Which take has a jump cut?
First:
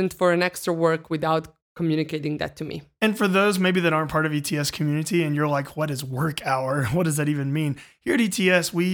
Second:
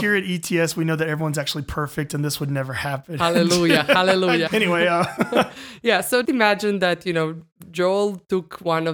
second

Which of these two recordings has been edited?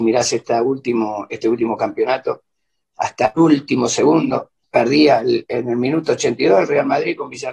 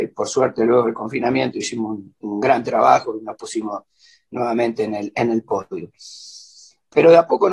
first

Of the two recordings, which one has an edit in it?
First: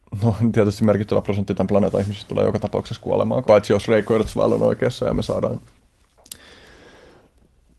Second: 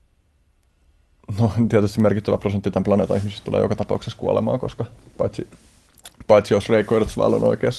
first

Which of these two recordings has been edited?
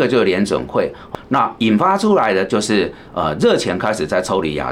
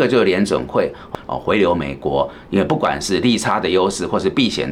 second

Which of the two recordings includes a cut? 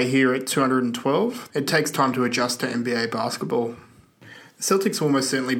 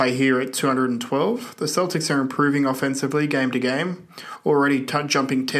first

